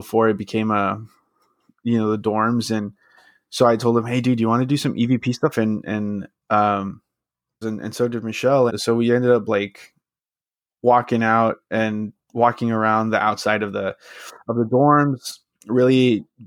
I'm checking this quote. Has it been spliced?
yes; 3 cuts; at 5.5 s, 7.6 s, 8.7 s

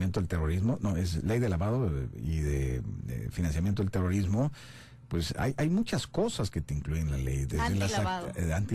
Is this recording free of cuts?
yes; 0 cuts

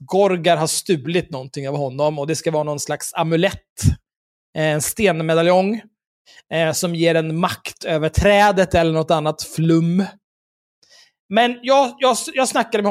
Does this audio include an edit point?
no; 0 cuts

